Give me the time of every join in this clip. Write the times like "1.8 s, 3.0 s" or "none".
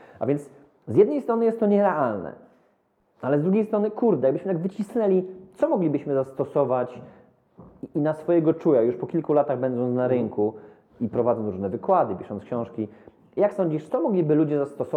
13.9 s